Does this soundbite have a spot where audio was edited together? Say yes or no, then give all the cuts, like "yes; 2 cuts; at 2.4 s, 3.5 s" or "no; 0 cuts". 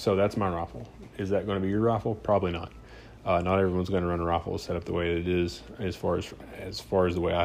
no; 0 cuts